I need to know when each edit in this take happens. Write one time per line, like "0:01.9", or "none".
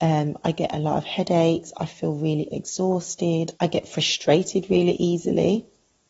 0:03.5

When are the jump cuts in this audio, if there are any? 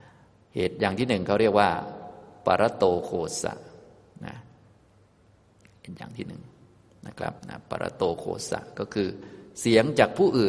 0:07.4

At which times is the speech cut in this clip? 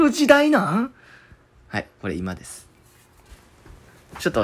none

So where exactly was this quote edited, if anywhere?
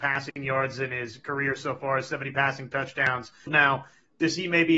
0:03.5

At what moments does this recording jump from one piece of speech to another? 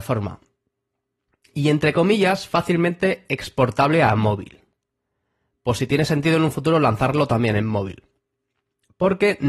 none

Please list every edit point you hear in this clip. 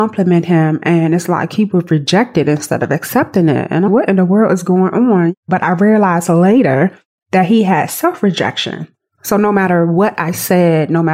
0:03.9

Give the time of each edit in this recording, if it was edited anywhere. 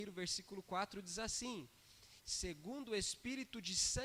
0:02.2

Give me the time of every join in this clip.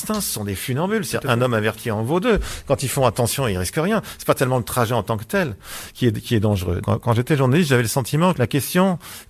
0:06.8
0:08.4

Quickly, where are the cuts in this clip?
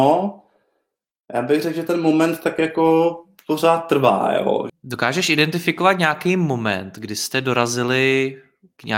0:04.7

